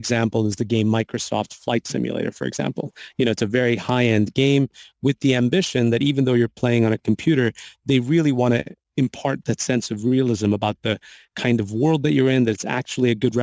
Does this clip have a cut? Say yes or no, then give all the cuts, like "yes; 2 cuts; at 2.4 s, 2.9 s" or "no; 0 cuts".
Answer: no; 0 cuts